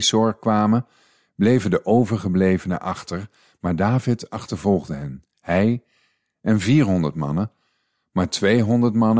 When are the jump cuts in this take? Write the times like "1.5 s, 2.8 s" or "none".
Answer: none